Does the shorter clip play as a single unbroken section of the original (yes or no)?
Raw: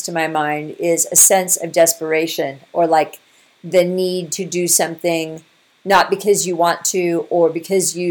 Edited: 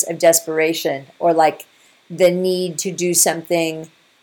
yes